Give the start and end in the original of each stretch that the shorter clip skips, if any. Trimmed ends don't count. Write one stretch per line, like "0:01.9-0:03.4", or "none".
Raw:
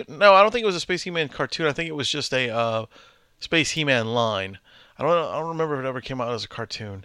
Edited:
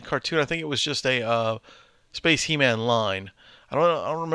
none